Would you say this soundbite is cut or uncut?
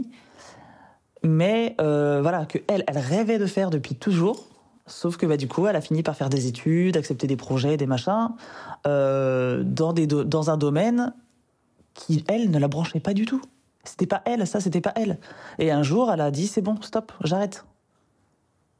uncut